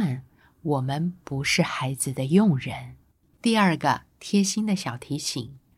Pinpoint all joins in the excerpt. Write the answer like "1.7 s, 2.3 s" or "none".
3.3 s